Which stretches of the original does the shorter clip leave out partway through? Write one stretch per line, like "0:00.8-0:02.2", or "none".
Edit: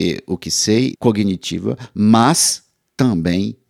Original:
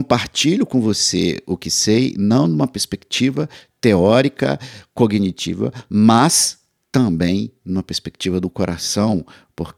0:02.1-0:04.9